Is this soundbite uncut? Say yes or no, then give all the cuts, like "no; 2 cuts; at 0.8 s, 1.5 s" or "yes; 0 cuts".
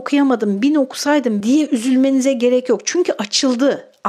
no; 1 cut; at 1.4 s